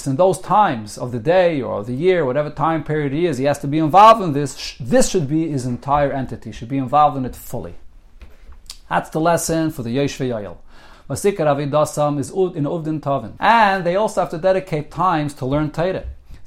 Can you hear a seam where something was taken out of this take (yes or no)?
yes